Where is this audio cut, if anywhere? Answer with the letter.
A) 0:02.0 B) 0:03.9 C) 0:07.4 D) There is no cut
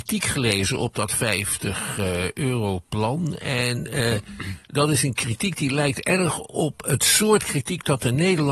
D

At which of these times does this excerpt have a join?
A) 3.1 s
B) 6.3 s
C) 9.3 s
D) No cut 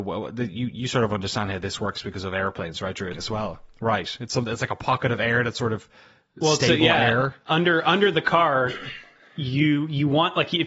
A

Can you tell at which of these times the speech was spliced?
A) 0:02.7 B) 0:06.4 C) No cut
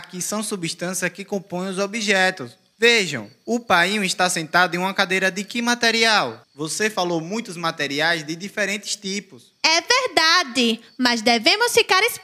B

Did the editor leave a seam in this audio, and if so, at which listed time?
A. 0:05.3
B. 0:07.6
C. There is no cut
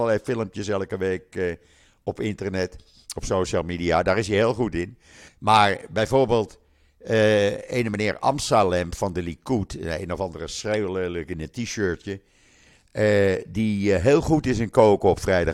A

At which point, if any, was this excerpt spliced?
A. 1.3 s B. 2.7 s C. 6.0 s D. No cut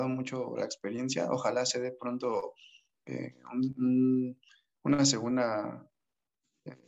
D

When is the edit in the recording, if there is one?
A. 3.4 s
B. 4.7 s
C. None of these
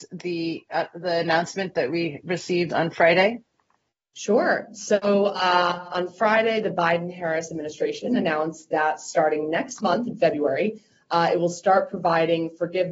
C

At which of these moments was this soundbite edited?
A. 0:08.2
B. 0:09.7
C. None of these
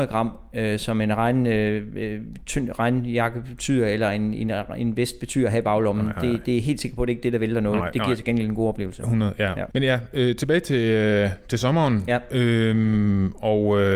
B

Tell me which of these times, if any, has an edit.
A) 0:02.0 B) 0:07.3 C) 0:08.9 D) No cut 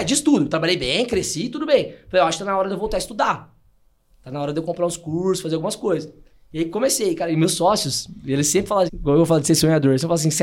C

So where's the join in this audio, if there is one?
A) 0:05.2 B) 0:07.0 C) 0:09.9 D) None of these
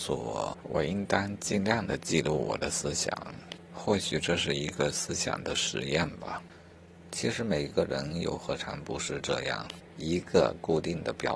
C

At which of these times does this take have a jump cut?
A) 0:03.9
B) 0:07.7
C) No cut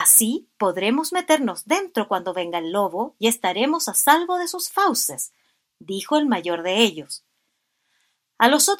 C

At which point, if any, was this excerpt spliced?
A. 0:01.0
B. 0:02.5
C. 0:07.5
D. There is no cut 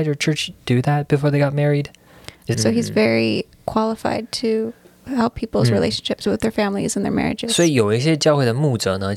B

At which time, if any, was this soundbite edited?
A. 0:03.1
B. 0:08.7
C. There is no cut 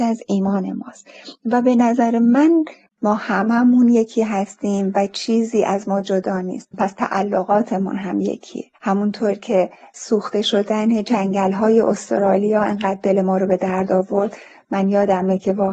B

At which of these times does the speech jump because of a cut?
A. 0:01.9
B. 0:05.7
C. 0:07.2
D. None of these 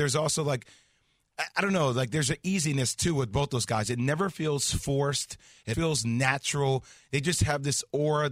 B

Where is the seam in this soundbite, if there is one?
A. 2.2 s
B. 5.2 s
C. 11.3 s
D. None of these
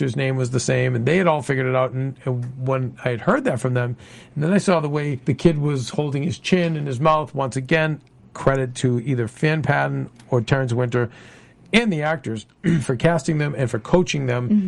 B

